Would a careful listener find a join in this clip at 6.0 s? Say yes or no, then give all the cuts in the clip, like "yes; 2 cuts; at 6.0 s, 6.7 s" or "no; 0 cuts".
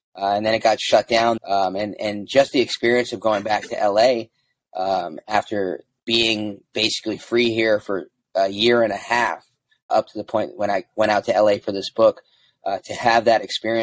yes; 3 cuts; at 1.4 s, 6.0 s, 9.9 s